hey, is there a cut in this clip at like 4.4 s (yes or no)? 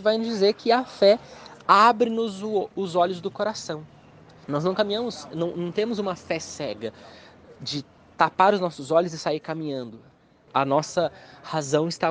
yes